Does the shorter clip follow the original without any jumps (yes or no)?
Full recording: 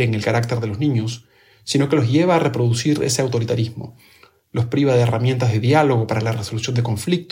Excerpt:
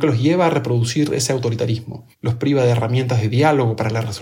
no